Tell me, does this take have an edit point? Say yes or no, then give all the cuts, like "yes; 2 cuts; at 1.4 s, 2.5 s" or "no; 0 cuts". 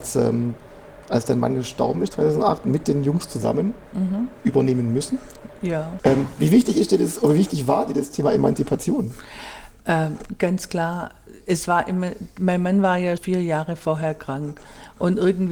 yes; 2 cuts; at 6.0 s, 13.2 s